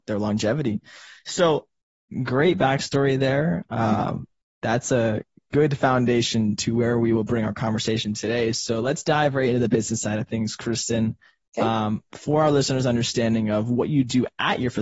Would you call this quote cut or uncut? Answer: uncut